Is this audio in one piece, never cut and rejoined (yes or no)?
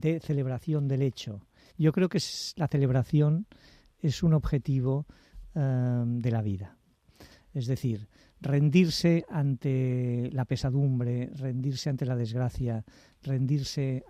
no